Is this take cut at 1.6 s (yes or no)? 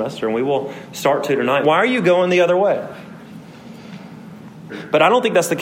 yes